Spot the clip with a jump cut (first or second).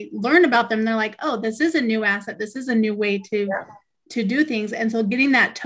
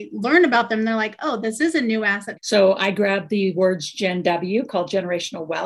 second